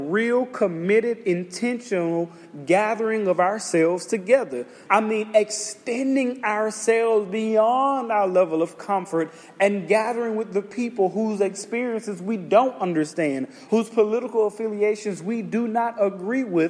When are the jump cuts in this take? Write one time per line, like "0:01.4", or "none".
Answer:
0:04.9
0:13.7